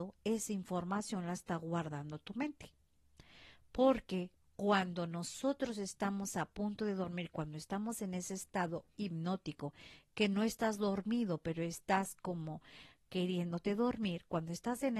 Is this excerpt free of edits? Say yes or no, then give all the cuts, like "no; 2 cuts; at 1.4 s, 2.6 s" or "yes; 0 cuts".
yes; 0 cuts